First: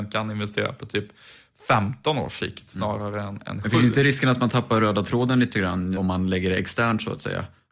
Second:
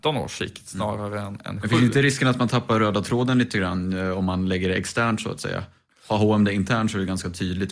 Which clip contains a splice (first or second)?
first